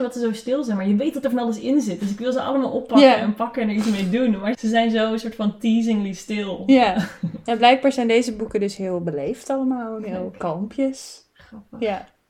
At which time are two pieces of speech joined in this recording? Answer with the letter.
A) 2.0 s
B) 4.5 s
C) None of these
B